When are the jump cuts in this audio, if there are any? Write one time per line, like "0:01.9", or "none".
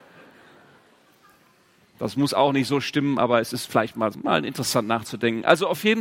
0:04.1